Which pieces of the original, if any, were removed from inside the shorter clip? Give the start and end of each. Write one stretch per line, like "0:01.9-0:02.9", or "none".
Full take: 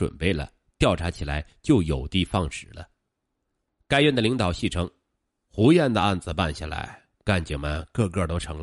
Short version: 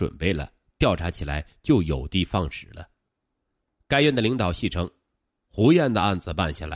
none